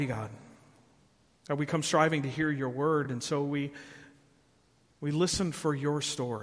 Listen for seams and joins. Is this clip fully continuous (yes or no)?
yes